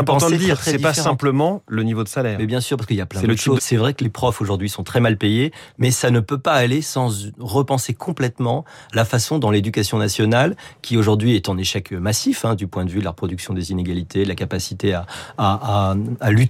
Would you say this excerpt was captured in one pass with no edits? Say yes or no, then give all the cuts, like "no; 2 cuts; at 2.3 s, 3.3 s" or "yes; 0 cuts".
no; 1 cut; at 3.6 s